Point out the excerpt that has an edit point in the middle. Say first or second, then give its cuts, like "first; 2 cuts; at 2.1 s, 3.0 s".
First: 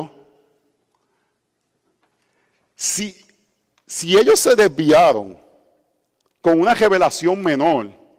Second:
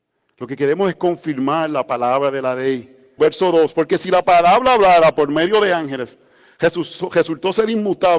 second; 1 cut; at 3.2 s